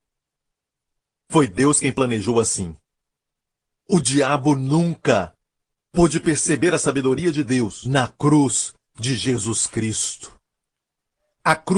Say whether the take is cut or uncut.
uncut